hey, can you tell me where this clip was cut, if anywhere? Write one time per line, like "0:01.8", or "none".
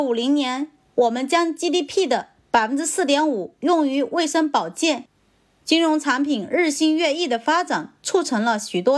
0:05.5